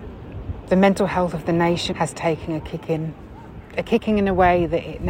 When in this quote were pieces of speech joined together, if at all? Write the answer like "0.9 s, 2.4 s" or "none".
1.9 s

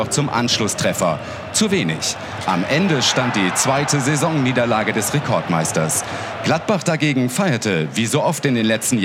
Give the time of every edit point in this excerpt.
none

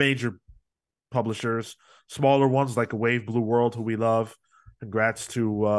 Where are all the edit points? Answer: none

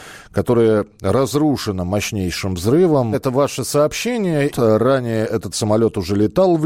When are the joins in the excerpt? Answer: 3.1 s, 4.5 s

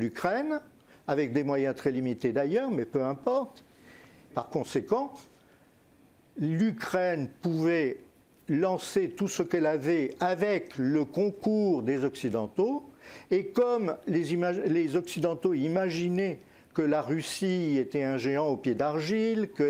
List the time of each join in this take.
4.3 s

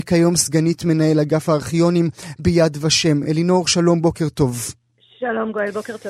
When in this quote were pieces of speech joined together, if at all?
none

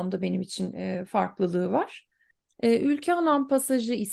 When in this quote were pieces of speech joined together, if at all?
2.5 s

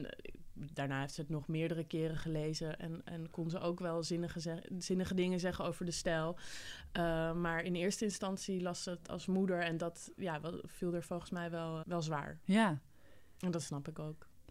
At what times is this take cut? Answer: 11.8 s

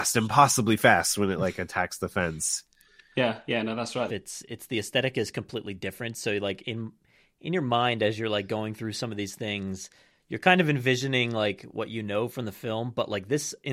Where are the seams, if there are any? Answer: 4.1 s

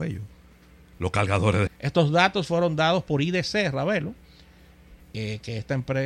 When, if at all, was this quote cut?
1.7 s

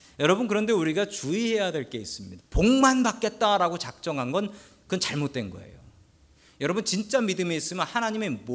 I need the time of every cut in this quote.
2.4 s

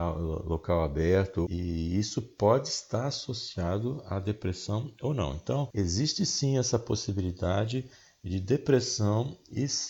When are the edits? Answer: 1.5 s

